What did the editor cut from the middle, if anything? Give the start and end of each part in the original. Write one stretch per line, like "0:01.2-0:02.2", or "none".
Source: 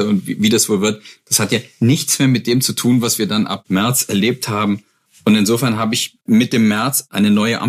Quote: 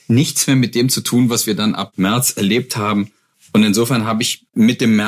none